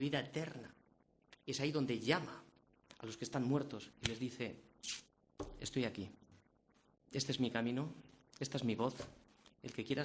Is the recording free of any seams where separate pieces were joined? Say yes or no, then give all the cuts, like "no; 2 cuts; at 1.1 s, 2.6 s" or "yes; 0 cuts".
yes; 0 cuts